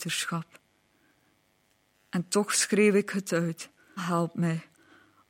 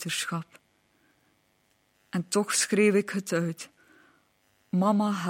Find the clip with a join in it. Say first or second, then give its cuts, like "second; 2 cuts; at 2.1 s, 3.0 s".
first; 1 cut; at 4.0 s